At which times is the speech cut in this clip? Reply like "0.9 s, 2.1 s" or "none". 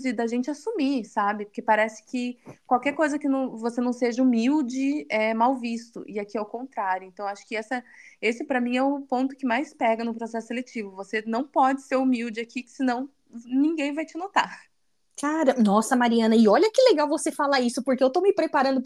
none